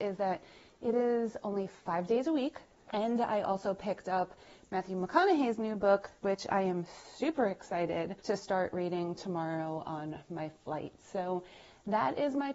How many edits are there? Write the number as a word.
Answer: three